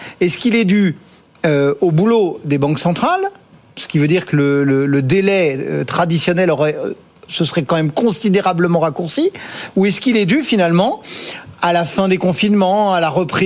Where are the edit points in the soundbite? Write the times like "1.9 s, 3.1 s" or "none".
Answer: none